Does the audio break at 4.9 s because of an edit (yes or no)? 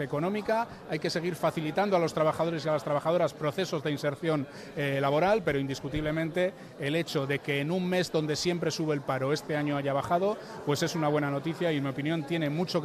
no